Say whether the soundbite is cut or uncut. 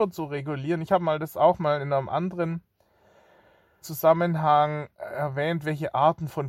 cut